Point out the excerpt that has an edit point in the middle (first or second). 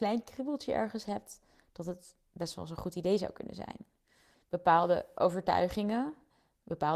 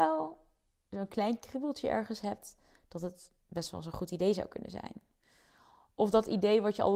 first